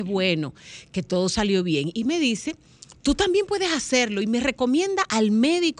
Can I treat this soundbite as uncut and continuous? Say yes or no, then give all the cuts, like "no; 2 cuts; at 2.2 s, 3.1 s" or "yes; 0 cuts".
yes; 0 cuts